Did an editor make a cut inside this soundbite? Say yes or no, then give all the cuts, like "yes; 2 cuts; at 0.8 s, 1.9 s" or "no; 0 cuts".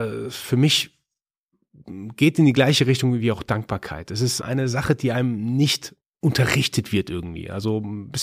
yes; 1 cut; at 4.4 s